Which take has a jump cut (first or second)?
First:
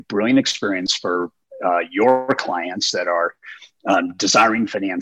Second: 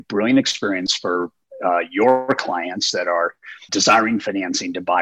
second